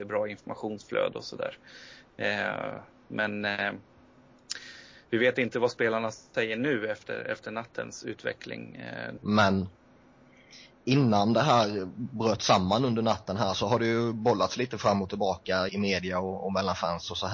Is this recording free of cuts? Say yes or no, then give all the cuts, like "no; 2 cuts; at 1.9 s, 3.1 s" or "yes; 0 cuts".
no; 2 cuts; at 9.2 s, 15.7 s